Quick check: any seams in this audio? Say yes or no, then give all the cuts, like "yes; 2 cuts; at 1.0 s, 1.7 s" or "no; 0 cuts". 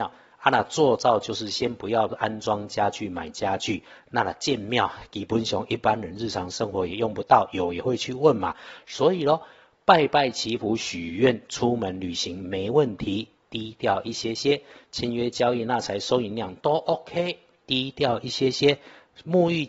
no; 0 cuts